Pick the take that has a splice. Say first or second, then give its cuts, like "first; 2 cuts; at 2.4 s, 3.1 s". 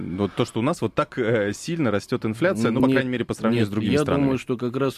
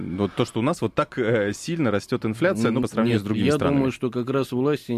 second; 1 cut; at 2.8 s